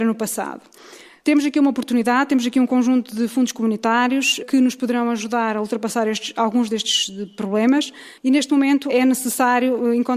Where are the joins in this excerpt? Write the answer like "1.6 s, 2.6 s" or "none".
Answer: none